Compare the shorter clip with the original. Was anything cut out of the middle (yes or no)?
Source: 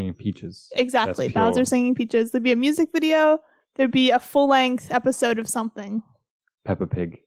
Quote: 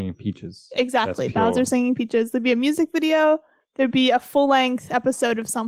no